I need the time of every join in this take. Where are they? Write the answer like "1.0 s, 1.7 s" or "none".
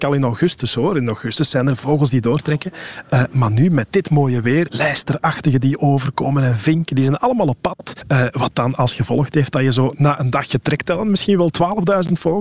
4.7 s

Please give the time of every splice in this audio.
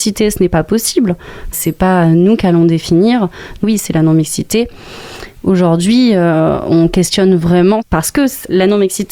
1.5 s, 3.6 s

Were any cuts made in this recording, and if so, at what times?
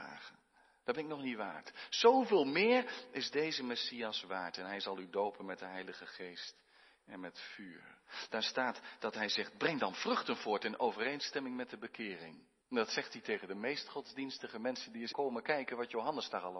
8.3 s, 12.6 s, 15.1 s

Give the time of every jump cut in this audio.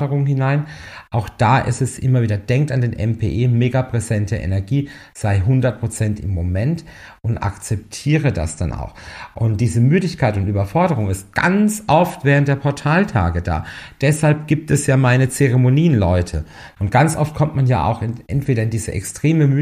16.8 s

